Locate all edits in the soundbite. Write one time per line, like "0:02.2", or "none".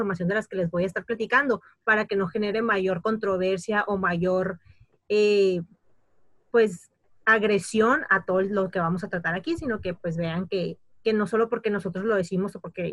none